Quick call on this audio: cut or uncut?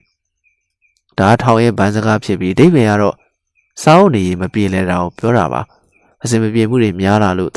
uncut